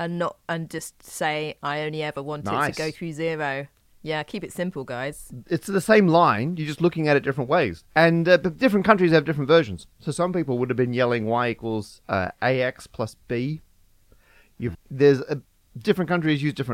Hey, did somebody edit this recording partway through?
yes; 1 cut; at 14.7 s

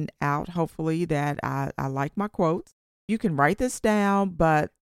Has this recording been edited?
yes; 1 cut; at 3.0 s

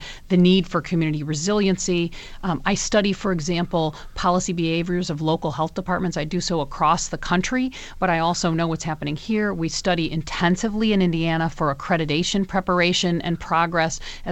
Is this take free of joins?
yes; 0 cuts

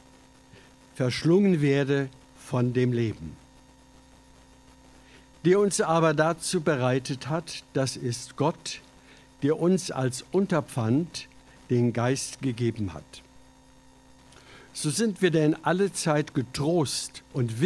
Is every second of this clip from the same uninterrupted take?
yes; 0 cuts

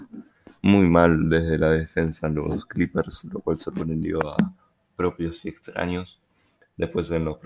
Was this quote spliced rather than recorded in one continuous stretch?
no; 0 cuts

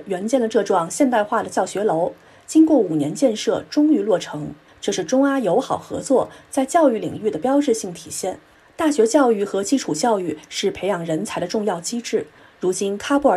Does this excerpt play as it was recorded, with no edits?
yes; 0 cuts

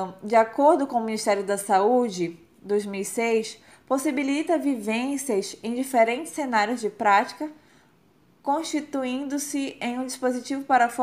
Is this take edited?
no; 0 cuts

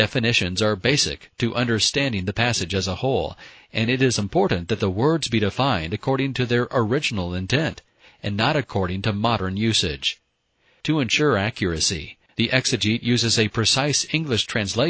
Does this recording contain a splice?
no; 0 cuts

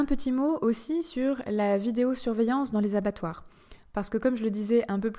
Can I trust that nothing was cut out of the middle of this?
yes; 0 cuts

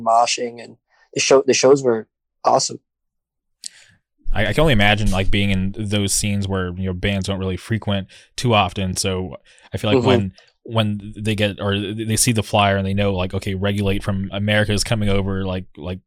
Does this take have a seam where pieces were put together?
no; 0 cuts

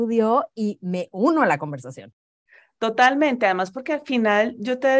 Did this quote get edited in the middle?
no; 0 cuts

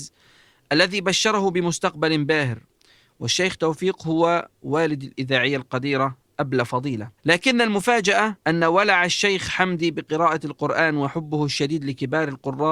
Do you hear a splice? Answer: yes; 2 cuts; at 7.2 s, 8.4 s

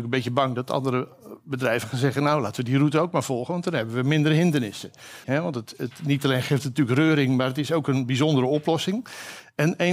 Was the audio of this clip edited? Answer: yes; 1 cut; at 5.2 s

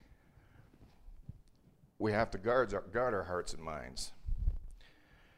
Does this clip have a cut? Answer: no; 0 cuts

